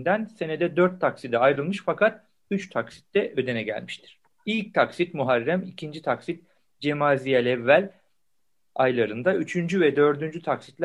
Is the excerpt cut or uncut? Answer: cut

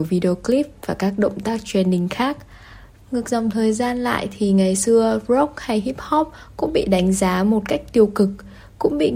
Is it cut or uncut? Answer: cut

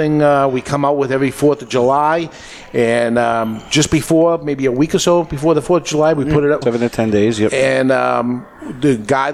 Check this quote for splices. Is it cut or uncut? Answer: cut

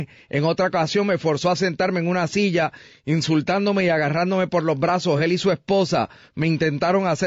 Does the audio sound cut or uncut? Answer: uncut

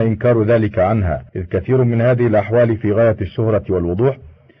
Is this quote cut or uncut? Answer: cut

